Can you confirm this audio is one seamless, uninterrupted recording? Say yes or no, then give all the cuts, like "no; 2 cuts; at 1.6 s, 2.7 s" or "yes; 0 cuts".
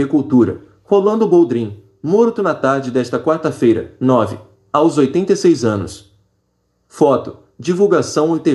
yes; 0 cuts